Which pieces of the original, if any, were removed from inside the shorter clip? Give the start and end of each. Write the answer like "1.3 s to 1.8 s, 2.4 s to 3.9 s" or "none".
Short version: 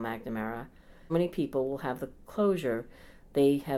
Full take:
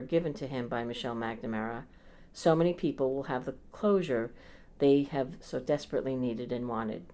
2.3 s to 2.6 s